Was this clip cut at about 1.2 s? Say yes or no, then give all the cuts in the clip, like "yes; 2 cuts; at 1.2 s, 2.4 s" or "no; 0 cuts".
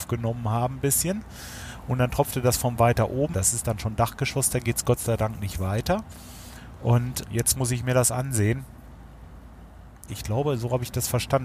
no; 3 cuts; at 3.3 s, 7.2 s, 10.1 s